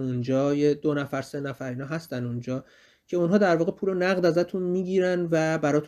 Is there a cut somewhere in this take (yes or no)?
no